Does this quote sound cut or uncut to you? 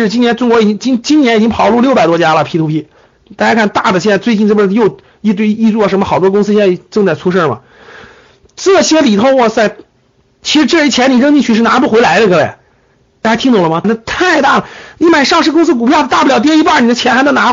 cut